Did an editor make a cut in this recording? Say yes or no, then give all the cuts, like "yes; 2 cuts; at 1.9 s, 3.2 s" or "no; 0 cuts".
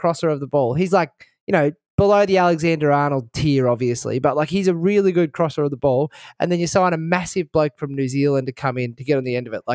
no; 0 cuts